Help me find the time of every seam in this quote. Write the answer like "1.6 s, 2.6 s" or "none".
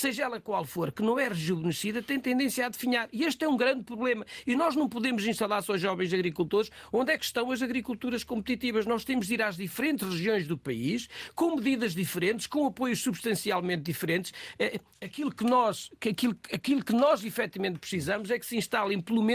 14.9 s